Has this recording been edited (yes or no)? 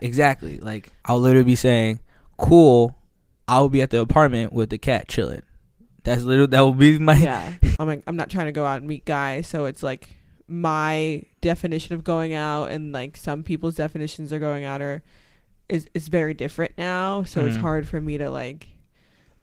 yes